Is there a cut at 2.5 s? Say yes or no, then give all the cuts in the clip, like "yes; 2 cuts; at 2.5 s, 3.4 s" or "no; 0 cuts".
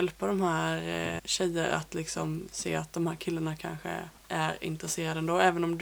no; 2 cuts; at 1.2 s, 4.2 s